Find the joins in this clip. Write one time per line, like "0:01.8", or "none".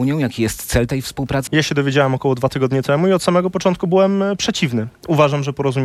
0:01.5

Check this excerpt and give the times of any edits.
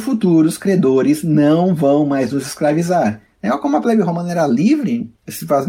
0:03.3

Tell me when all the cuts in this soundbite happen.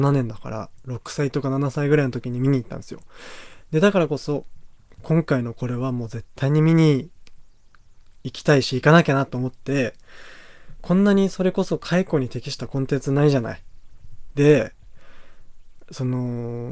0:14.3

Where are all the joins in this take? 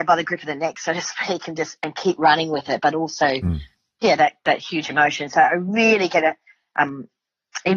none

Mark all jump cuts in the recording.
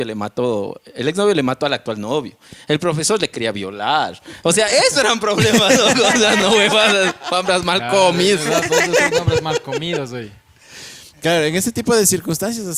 none

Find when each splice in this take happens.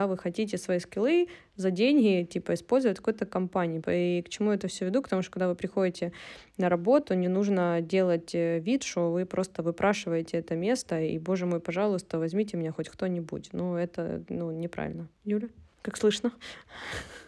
0:03.8

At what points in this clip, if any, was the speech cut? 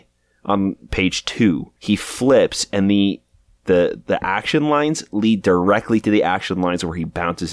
0:01.8
0:03.6

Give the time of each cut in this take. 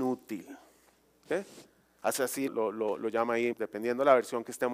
0:02.5
0:03.5

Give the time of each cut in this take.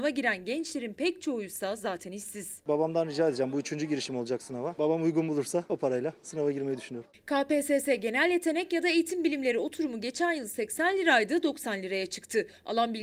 none

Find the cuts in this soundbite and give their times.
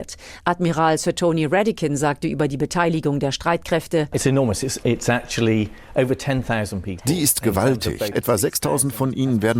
0:08.1

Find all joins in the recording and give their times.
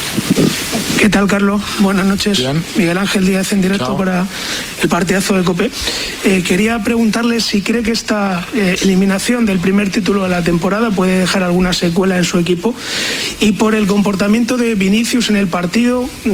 none

